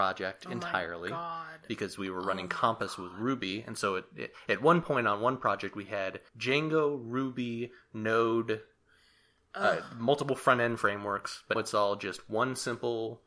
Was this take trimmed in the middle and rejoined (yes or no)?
yes